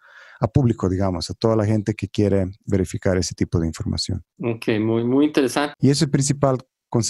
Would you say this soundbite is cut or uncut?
cut